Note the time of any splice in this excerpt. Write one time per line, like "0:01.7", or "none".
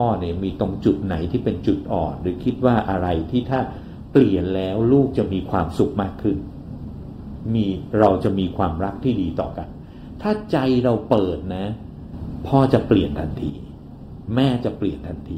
none